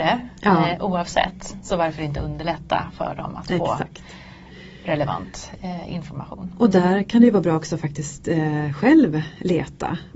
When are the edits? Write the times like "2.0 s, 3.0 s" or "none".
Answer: none